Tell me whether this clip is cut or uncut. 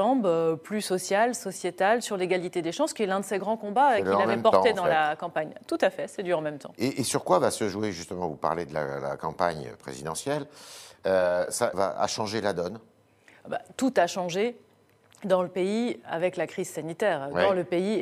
cut